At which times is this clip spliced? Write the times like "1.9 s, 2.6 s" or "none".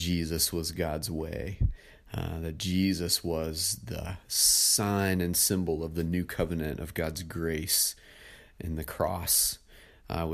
none